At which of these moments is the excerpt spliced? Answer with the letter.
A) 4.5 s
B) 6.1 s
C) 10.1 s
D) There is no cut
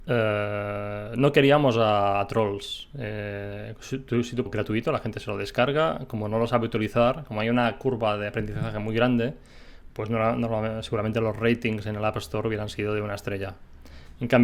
A